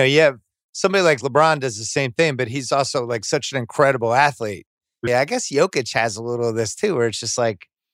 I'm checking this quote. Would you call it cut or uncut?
cut